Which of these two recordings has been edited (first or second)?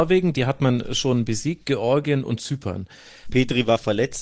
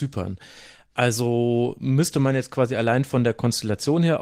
first